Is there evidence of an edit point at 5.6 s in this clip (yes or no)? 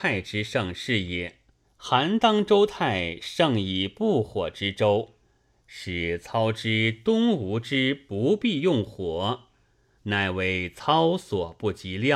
no